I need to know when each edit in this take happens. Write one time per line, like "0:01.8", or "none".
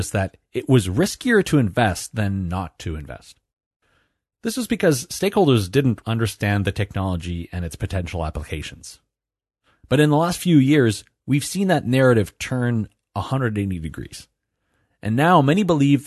0:06.0